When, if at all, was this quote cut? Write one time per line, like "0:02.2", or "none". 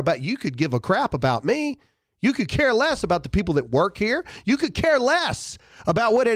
none